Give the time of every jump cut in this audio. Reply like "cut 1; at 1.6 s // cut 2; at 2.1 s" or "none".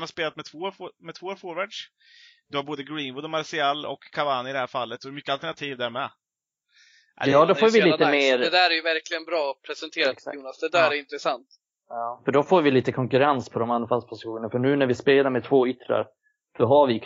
none